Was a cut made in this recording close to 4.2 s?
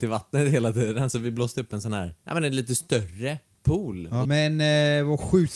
yes; 2 cuts; at 2.2 s, 4.2 s

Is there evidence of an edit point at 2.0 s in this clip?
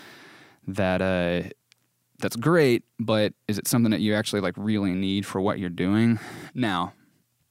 no; 1 cut; at 6.5 s

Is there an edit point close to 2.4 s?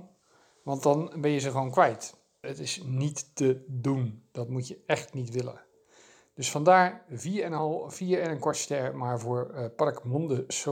yes; 1 cut; at 2.4 s

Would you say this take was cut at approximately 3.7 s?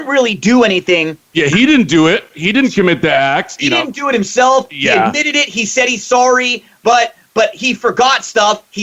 no; 1 cut; at 1.3 s

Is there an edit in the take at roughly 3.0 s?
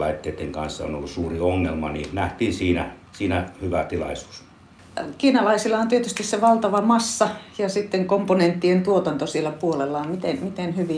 yes; 1 cut; at 3.0 s

